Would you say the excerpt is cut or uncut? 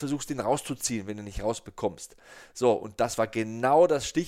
uncut